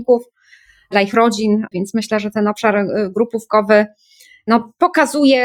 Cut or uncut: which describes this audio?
cut